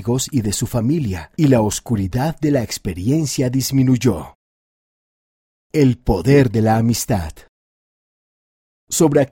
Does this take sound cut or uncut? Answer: uncut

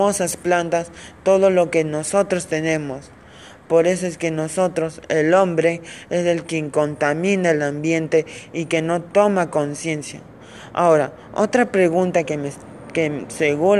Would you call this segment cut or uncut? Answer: cut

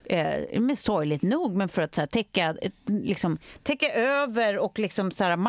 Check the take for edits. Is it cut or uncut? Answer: uncut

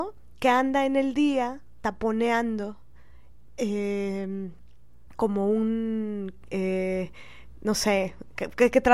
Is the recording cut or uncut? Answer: cut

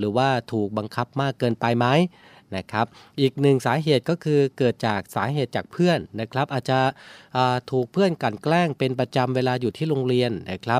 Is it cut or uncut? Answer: uncut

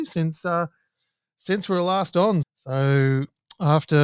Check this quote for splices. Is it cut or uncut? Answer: cut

